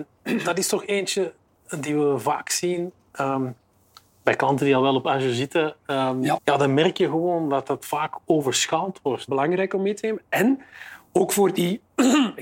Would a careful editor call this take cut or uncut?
cut